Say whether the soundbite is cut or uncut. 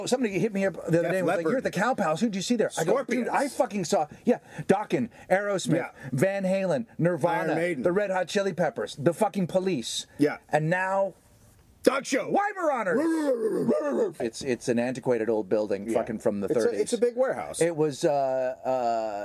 cut